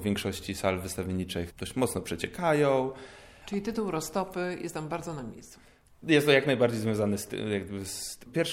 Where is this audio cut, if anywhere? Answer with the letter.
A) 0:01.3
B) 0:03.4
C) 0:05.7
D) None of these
B